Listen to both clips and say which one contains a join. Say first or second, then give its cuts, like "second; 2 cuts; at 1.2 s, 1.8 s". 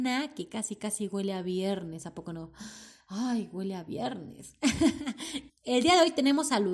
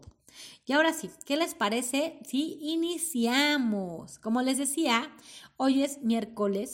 first; 1 cut; at 5.5 s